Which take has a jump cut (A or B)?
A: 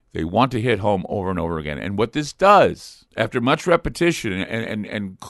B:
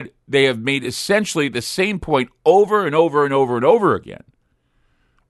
A